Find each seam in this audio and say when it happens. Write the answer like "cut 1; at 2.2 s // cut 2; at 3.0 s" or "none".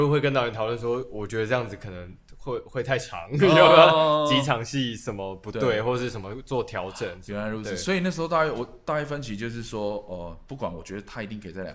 none